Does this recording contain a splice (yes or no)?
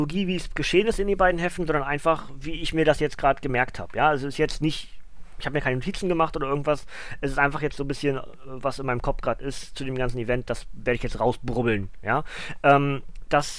no